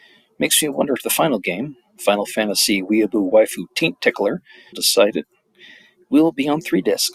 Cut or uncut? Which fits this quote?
cut